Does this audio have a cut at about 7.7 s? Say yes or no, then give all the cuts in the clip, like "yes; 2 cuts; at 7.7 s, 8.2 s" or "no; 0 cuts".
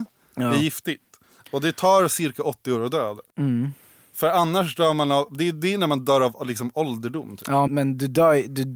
yes; 1 cut; at 7.7 s